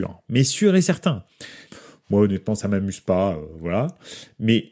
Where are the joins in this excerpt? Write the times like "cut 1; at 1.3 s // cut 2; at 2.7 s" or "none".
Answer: cut 1; at 1.7 s